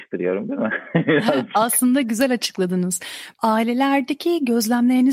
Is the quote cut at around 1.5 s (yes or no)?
no